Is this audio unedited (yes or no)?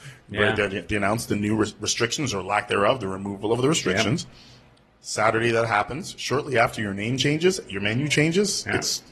yes